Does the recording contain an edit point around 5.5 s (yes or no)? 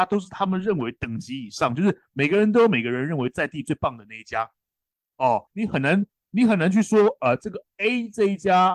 yes